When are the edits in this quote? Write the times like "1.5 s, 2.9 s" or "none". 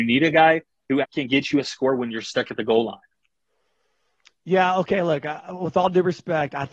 1.0 s